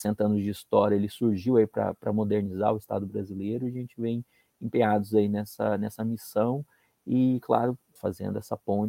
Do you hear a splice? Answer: yes; 1 cut; at 8.0 s

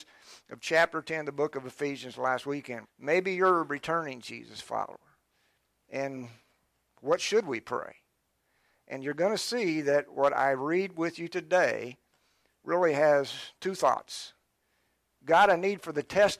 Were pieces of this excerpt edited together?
yes; 2 cuts; at 2.8 s, 15.2 s

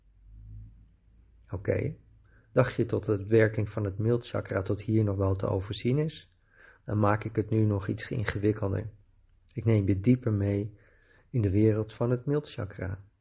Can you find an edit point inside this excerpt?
no; 0 cuts

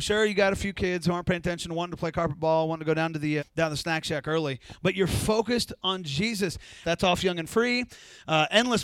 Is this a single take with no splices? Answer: no; 2 cuts; at 3.4 s, 6.8 s

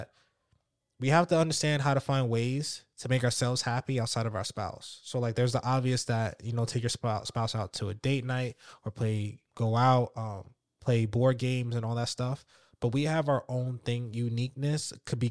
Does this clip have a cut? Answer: yes; 1 cut; at 9.5 s

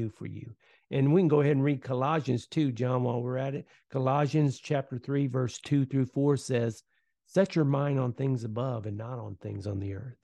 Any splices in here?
no; 0 cuts

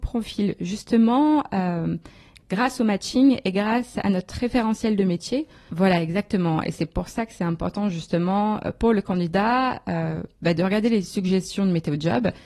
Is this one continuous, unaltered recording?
no; 1 cut; at 5.7 s

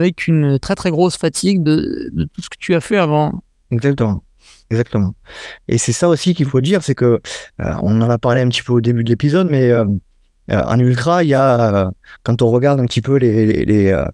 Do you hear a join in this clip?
no; 0 cuts

